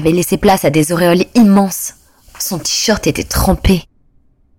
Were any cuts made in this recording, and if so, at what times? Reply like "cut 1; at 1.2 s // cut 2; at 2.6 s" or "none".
none